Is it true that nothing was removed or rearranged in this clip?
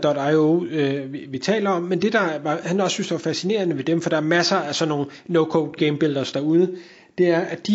no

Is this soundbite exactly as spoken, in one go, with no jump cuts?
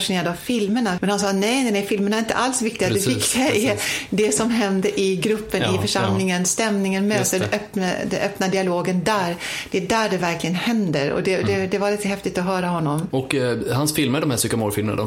no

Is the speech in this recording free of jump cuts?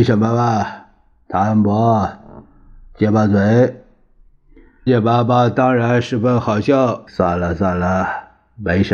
no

